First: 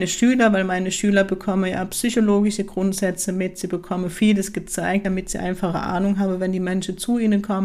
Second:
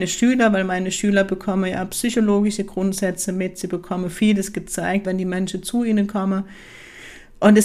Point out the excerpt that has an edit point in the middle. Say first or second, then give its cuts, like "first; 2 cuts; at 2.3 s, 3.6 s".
second; 1 cut; at 5.0 s